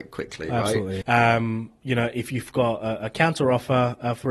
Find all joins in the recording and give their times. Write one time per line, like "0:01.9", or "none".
0:01.0